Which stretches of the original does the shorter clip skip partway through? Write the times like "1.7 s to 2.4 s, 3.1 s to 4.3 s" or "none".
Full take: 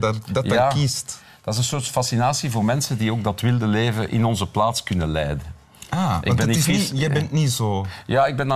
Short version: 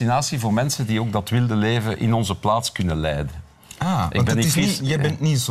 none